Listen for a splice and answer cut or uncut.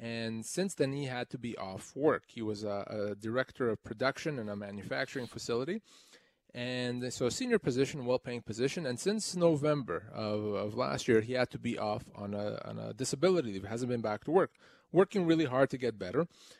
uncut